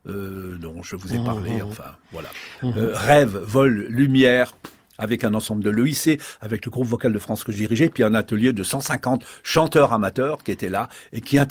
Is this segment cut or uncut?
cut